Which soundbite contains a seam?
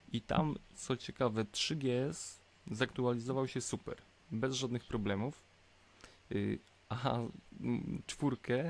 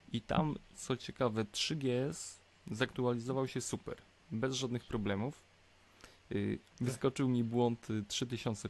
second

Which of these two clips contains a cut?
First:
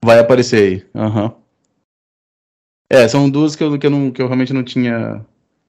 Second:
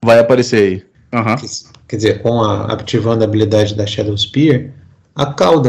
second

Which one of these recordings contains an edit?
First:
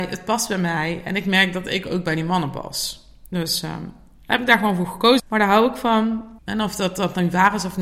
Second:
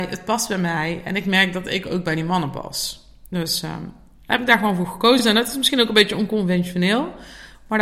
first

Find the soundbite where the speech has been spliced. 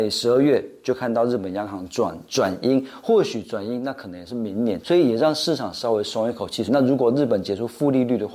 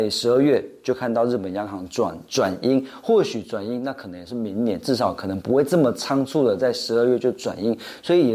first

